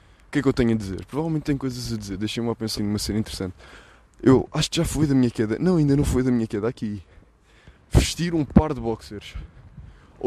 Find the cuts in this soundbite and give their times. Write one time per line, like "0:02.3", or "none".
0:02.8
0:07.8